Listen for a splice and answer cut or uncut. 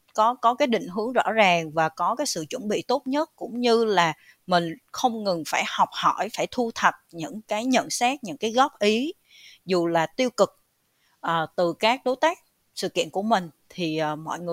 uncut